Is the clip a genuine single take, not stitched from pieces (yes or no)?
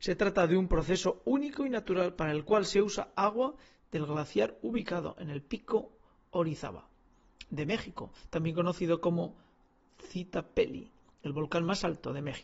yes